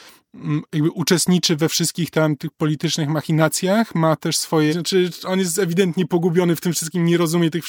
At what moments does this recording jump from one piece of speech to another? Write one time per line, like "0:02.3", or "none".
0:04.7